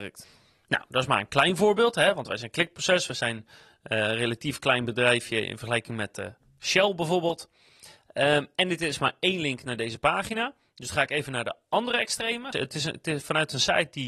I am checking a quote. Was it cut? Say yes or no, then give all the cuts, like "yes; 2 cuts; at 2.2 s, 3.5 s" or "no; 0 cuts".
yes; 1 cut; at 12.5 s